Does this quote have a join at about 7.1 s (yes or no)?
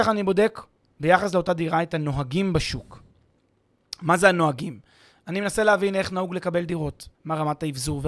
yes